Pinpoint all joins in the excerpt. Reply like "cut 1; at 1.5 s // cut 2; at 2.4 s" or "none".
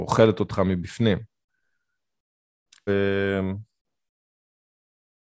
cut 1; at 2.9 s